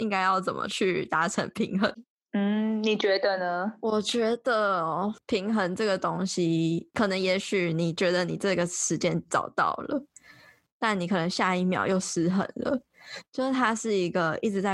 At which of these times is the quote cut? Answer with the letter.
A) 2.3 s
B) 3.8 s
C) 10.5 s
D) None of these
D